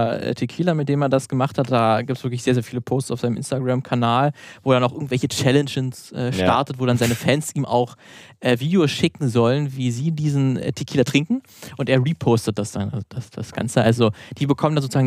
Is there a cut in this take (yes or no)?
no